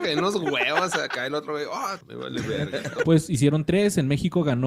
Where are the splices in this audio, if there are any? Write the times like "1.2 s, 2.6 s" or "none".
2.0 s, 3.0 s

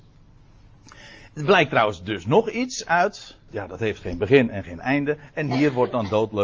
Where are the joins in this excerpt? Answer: 3.5 s

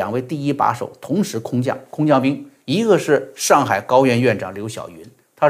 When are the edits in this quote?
none

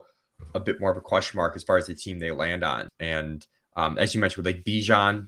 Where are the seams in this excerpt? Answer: 2.9 s

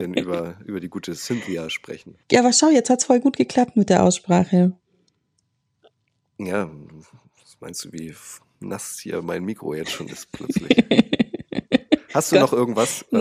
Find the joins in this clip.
2.2 s

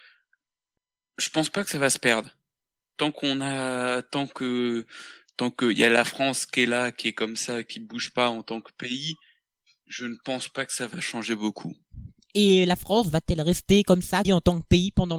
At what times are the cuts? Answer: 14.2 s

